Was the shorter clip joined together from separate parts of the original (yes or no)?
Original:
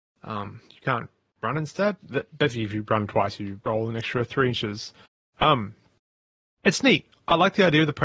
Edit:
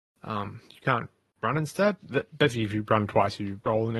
no